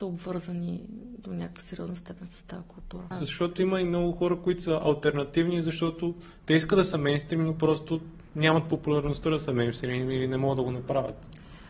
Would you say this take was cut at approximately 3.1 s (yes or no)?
yes